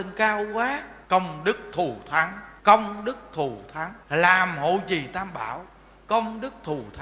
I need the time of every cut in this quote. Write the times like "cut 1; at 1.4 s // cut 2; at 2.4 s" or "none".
cut 1; at 1.0 s // cut 2; at 2.6 s // cut 3; at 4.0 s